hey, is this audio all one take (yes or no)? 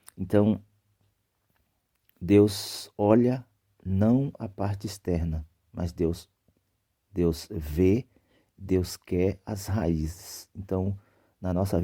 yes